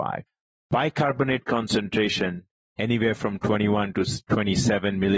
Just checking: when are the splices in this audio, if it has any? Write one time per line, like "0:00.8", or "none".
none